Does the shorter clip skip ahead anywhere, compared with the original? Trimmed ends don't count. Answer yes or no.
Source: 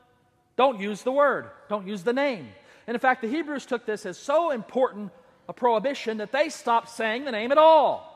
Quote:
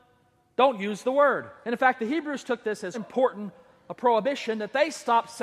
yes